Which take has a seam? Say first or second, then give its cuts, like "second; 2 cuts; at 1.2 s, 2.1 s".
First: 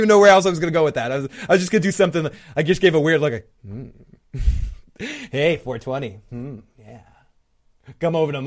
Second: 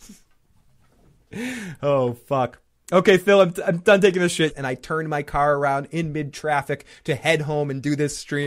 second; 1 cut; at 4.5 s